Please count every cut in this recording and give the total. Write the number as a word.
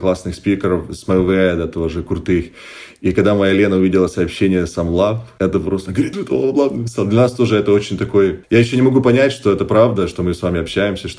one